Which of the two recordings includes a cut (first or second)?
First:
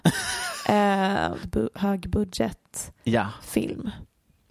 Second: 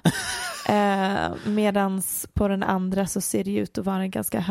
first